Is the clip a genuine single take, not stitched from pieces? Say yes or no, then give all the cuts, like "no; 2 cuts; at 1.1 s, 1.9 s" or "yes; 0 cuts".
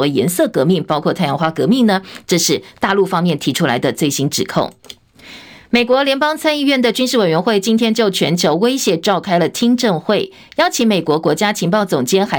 yes; 0 cuts